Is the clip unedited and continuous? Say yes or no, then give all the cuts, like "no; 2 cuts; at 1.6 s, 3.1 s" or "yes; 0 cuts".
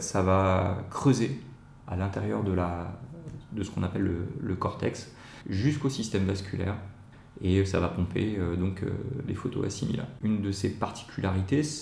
no; 1 cut; at 10.2 s